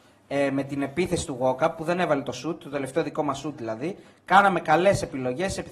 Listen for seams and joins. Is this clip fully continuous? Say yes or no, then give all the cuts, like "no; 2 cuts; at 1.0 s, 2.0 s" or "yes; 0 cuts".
yes; 0 cuts